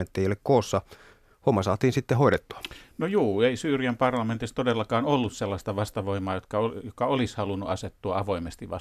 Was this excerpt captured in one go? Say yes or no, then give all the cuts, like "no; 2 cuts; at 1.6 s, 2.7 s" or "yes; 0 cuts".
yes; 0 cuts